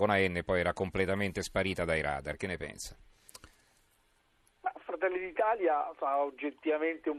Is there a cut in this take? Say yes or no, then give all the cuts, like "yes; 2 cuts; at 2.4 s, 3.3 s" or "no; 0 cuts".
no; 0 cuts